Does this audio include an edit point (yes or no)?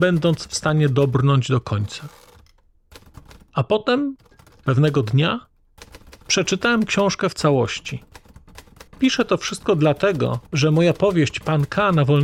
yes